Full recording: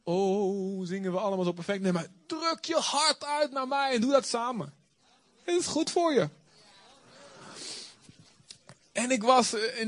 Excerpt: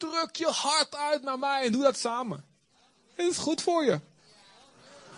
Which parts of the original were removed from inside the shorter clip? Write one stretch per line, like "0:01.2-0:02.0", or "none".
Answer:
none